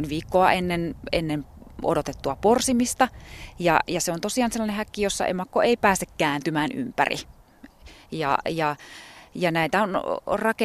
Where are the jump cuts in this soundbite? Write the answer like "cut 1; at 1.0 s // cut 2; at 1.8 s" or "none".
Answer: none